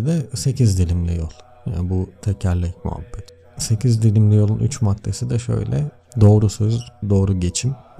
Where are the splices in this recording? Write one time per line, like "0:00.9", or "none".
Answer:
0:07.0